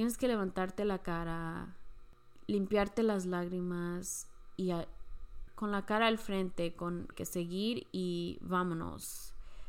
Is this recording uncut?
no; 2 cuts; at 5.5 s, 7.1 s

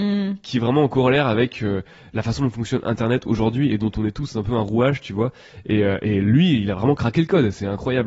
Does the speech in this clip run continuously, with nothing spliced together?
yes; 0 cuts

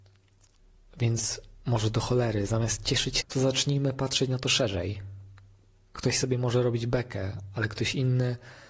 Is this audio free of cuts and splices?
no; 1 cut; at 3.2 s

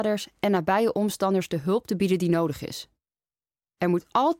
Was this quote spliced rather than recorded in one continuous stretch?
no; 0 cuts

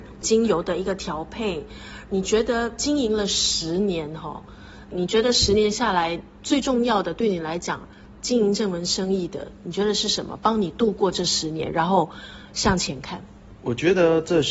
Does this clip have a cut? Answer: no; 0 cuts

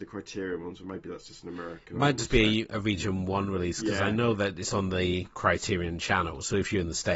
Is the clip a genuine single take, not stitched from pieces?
yes; 0 cuts

